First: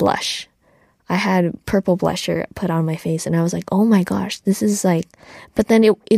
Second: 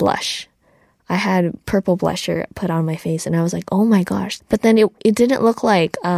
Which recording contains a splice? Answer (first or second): second